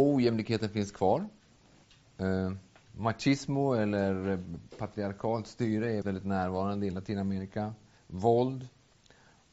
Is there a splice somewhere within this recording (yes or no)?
yes